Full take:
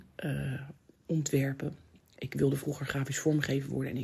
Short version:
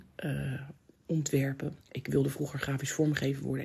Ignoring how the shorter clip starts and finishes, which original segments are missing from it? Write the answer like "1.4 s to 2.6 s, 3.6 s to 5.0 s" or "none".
1.8 s to 2.1 s